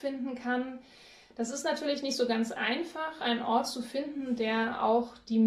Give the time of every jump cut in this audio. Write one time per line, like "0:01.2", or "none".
none